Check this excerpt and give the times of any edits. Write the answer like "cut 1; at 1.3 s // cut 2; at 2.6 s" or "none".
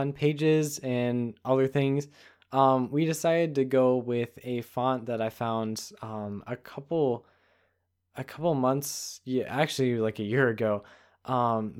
none